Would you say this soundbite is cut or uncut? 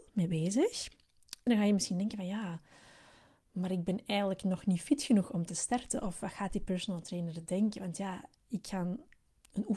cut